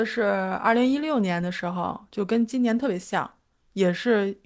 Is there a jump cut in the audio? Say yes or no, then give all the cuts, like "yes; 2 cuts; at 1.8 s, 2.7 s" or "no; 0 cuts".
no; 0 cuts